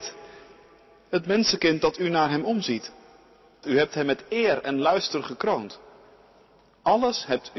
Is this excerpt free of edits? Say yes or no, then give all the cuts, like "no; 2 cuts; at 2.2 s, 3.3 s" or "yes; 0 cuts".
no; 1 cut; at 3.6 s